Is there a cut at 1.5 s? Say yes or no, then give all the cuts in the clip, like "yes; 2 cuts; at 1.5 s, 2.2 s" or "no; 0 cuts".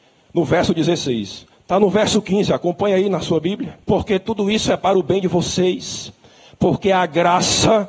yes; 2 cuts; at 1.5 s, 3.8 s